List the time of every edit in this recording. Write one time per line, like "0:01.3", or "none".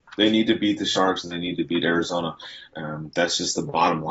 0:01.2
0:02.7